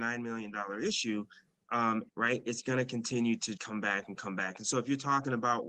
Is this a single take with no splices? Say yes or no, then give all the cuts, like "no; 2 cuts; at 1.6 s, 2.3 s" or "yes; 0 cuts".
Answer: no; 2 cuts; at 2.1 s, 3.6 s